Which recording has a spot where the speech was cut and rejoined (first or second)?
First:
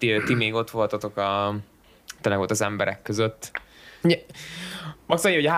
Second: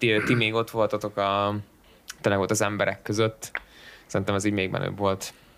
first